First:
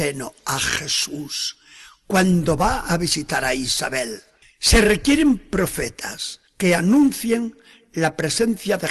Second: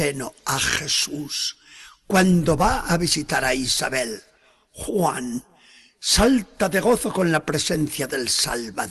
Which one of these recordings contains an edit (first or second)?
first